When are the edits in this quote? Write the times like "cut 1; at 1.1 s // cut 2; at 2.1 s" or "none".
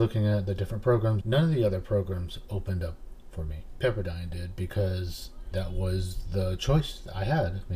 cut 1; at 1.2 s // cut 2; at 5.5 s